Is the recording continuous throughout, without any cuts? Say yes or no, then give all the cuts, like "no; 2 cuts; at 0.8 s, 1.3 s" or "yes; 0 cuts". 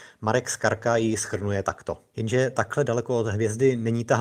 no; 1 cut; at 2.1 s